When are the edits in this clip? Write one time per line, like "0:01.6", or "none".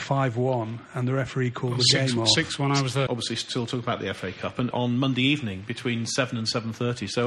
0:03.1
0:04.7